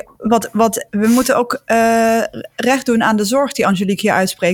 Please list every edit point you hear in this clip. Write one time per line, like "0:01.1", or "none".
none